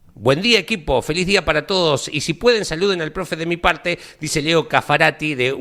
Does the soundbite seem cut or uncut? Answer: uncut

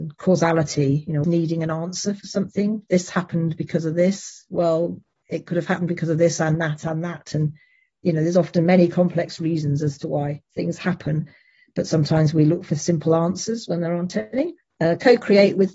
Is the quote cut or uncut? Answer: cut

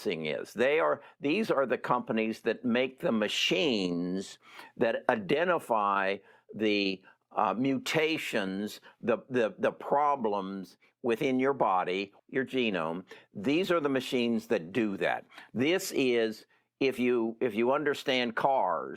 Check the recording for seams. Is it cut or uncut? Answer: cut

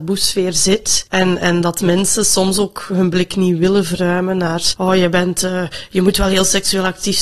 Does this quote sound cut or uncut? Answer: uncut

